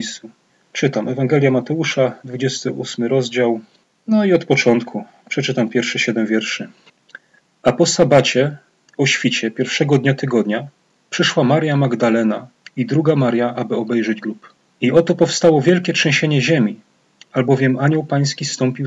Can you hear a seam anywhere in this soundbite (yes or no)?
no